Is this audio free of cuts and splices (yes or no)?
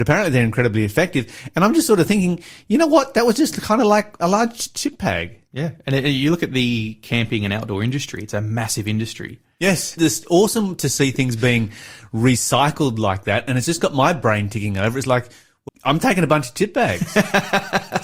no